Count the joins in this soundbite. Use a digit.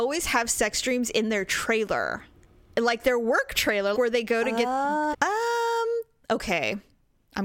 2